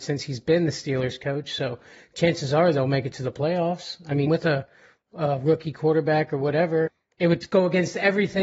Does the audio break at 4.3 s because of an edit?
yes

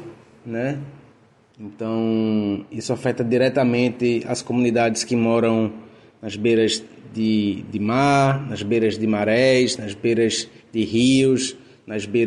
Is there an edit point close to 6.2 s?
no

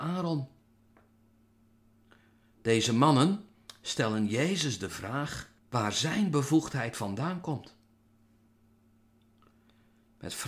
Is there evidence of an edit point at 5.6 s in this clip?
yes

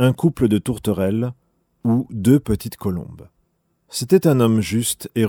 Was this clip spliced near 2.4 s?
no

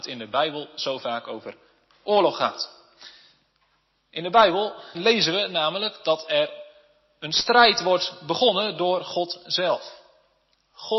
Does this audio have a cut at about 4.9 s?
yes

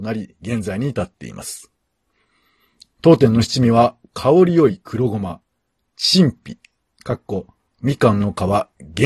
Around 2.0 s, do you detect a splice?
no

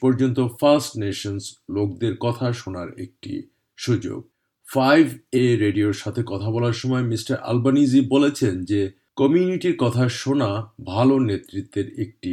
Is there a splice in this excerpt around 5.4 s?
yes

